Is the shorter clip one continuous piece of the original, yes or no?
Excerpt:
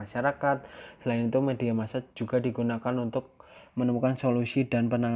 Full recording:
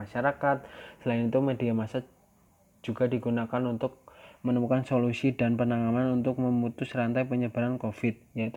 no